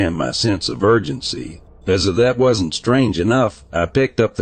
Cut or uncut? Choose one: cut